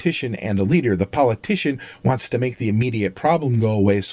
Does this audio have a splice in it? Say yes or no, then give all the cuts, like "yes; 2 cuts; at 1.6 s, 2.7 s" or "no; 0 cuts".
no; 0 cuts